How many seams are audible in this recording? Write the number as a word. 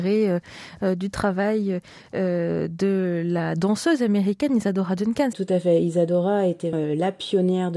two